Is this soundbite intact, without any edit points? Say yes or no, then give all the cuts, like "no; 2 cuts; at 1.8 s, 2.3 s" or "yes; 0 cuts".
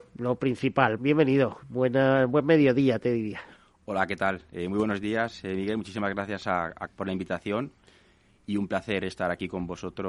no; 2 cuts; at 1.0 s, 6.9 s